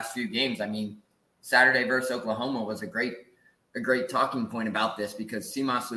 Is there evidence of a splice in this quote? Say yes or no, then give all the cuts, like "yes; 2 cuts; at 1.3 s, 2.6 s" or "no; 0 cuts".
no; 0 cuts